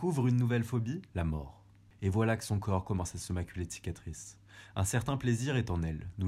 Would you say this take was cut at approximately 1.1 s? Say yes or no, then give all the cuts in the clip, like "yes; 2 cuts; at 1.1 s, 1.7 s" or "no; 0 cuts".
yes; 1 cut; at 1.1 s